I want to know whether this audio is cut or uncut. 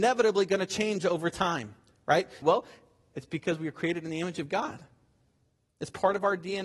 cut